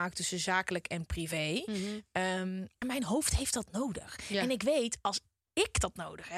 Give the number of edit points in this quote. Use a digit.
1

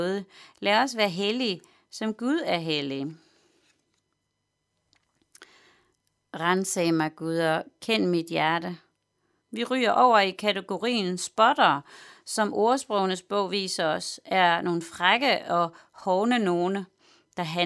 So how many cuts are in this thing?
1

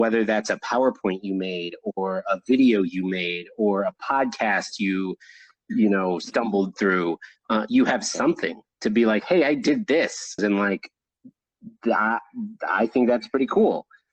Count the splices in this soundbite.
1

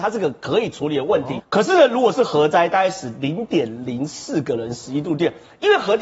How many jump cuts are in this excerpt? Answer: 1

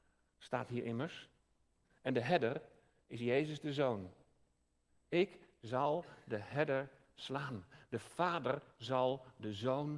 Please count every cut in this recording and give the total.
1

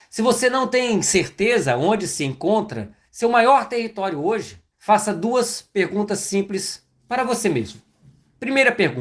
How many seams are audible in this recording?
2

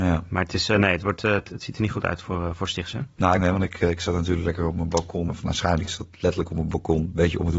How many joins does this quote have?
2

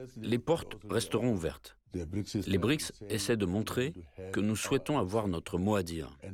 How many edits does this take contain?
1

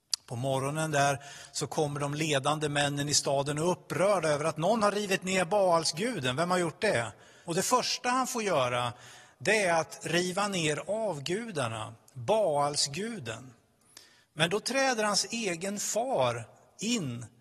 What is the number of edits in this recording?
2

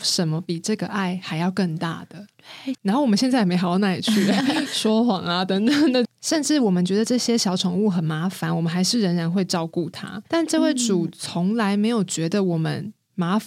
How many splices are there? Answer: 3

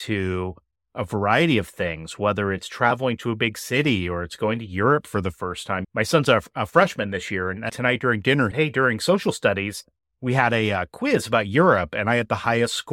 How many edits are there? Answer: 1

